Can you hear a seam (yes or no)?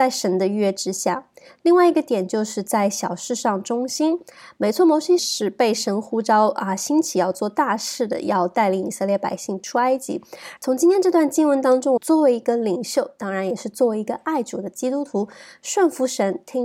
yes